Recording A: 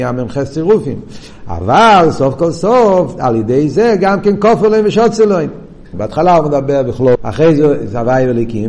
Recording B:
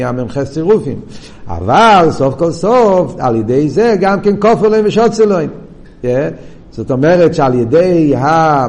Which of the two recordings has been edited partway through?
A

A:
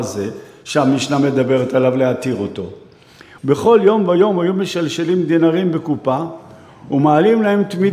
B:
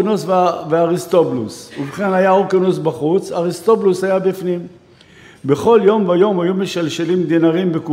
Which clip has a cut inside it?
A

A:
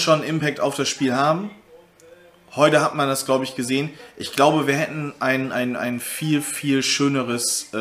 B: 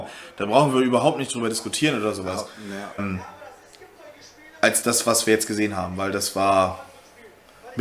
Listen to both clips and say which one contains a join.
B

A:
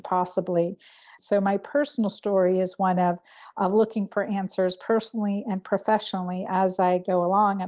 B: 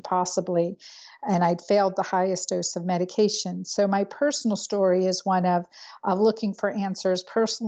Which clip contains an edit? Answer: A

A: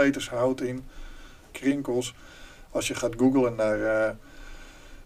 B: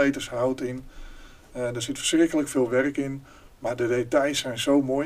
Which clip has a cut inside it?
A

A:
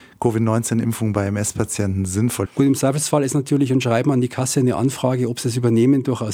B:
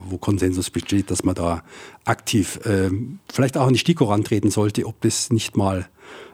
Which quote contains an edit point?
A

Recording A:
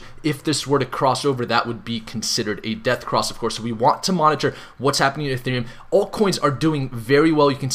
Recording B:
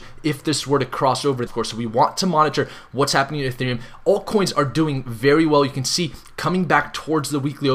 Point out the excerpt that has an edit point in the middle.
B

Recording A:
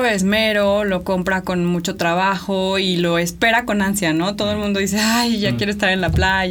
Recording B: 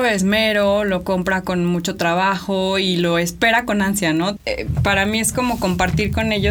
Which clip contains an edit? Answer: B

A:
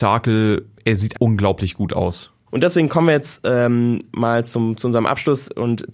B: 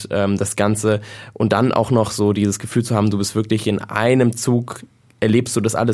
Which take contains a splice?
A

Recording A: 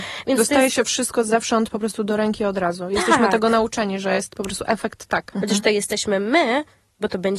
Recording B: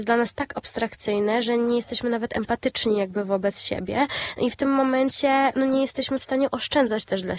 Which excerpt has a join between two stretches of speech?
A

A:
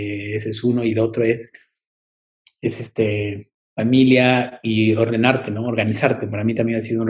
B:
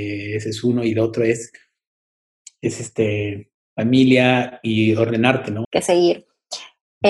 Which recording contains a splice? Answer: B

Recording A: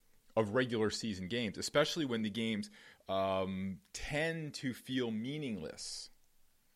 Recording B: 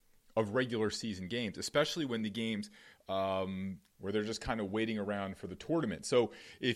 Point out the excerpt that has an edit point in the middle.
B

